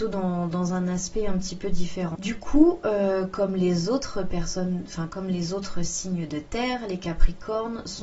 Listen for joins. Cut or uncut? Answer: cut